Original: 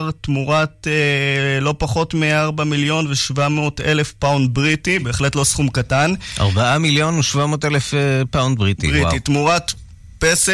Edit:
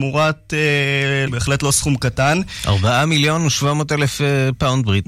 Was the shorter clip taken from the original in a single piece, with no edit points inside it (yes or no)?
no